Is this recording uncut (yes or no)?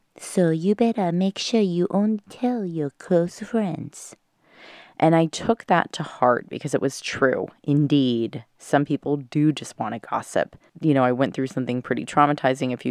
no